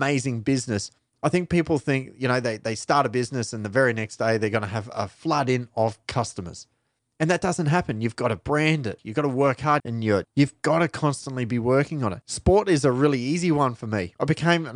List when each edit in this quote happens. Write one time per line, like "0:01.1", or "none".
0:09.8